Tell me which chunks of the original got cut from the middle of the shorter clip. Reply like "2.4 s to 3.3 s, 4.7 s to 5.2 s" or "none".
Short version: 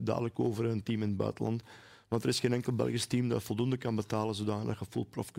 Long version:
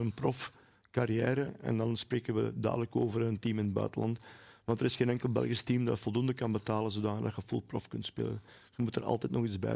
none